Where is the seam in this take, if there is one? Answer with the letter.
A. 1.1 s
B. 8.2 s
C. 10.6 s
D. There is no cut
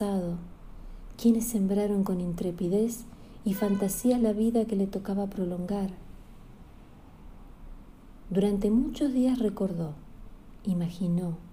A